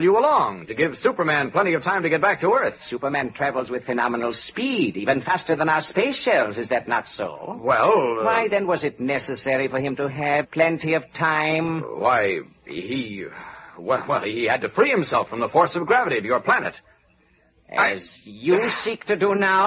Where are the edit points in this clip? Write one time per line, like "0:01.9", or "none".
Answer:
0:10.4

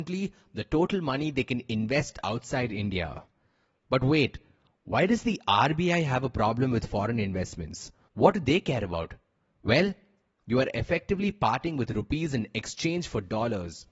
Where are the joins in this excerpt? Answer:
0:10.4

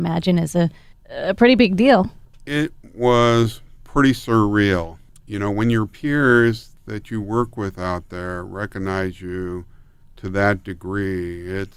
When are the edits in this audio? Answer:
none

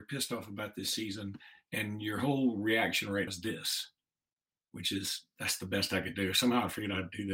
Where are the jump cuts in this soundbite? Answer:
0:03.3

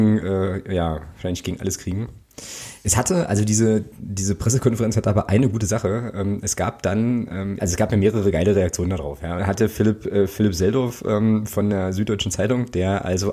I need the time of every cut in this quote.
0:07.6
0:09.4

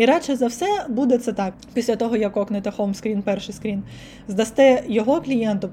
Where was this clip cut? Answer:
0:01.5

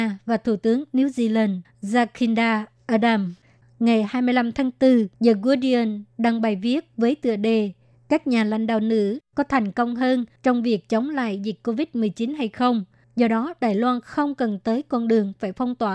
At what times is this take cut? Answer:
0:05.1
0:13.0

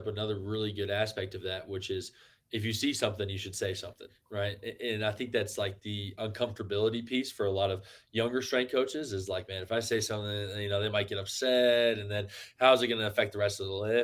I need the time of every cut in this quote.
none

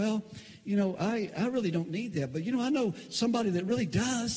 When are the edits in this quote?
none

